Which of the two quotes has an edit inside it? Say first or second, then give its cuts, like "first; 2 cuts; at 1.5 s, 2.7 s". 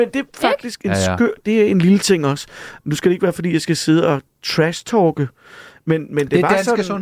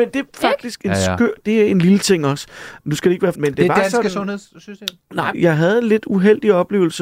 second; 2 cuts; at 3.3 s, 5.3 s